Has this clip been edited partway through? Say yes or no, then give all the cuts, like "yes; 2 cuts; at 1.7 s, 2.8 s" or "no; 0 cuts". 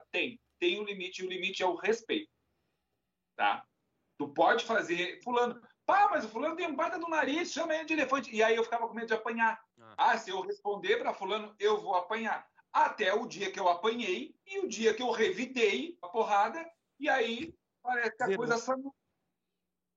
yes; 3 cuts; at 5.2 s, 9.7 s, 16.0 s